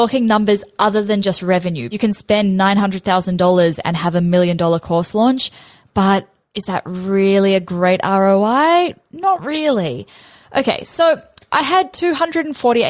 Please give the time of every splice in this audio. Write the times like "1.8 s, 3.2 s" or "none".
1.9 s

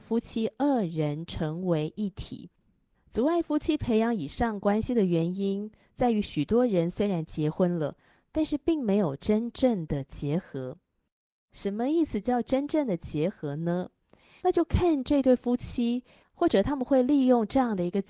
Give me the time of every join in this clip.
2.9 s, 14.4 s, 16.2 s

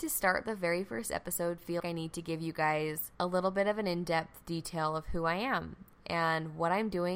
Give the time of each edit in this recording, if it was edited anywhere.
1.8 s, 3.1 s

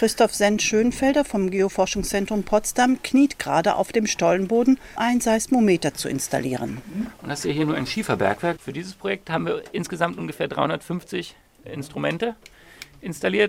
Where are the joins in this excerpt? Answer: 5.0 s, 8.6 s

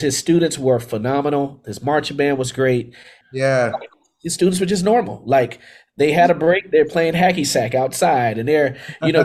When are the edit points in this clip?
3.2 s

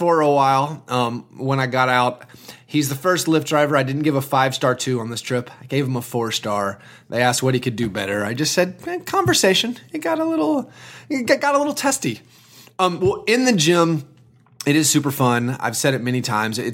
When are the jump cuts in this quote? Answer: none

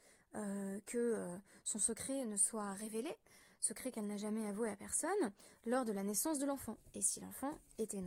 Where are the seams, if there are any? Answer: none

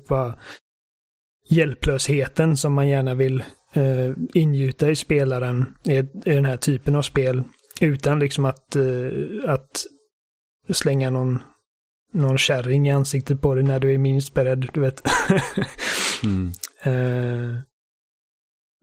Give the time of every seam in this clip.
none

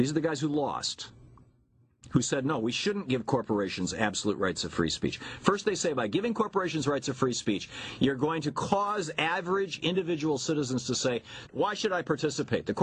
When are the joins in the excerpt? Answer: 11.5 s

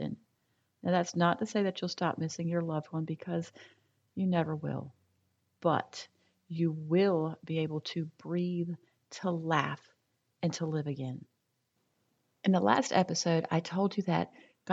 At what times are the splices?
none

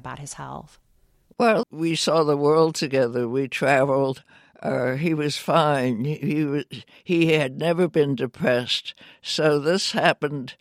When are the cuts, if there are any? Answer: 1.6 s

